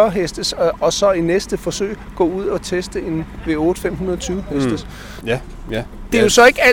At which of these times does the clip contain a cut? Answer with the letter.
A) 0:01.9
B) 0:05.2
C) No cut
B